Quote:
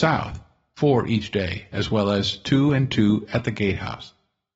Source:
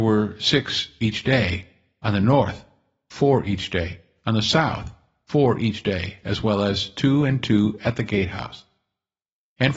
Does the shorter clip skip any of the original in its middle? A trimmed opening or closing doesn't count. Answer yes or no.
no